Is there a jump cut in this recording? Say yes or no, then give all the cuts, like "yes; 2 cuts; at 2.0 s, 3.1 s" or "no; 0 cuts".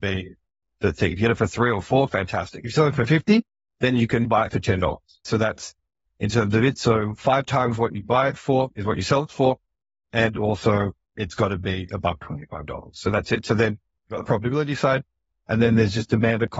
no; 0 cuts